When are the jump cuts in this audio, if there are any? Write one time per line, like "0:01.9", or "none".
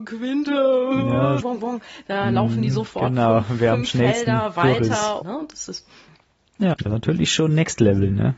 0:01.4
0:05.2
0:06.7